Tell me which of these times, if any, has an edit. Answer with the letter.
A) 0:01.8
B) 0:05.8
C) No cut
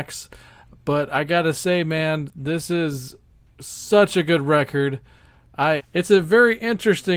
B